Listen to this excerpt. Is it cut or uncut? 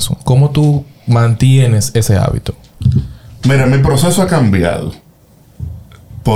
uncut